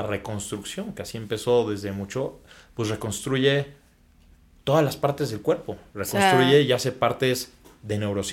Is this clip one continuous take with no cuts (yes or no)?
yes